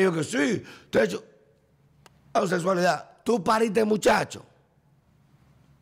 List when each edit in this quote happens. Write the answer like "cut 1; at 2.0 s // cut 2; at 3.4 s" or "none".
none